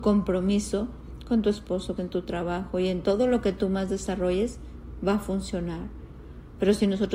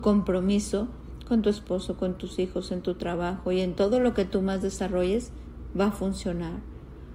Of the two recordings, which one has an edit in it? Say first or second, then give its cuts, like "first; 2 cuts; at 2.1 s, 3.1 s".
first; 1 cut; at 2.0 s